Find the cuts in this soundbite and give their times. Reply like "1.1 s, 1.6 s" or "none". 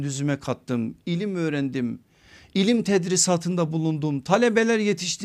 none